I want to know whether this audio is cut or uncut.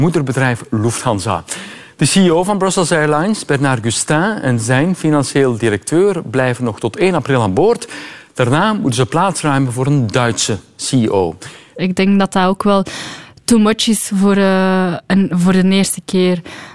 cut